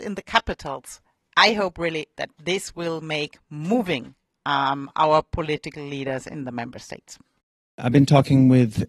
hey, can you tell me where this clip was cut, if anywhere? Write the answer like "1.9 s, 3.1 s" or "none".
none

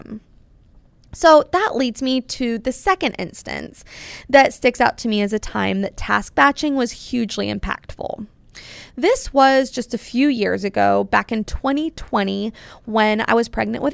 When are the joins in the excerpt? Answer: none

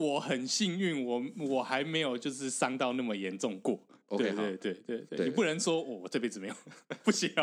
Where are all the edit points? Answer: none

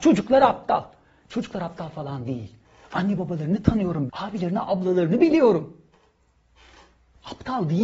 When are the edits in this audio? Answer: 4.1 s

